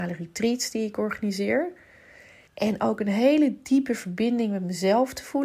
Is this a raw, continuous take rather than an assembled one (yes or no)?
no